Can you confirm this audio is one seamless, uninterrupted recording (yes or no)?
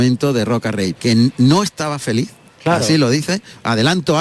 no